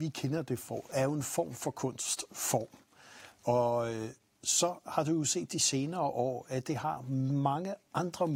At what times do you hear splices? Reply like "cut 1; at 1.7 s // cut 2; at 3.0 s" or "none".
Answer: none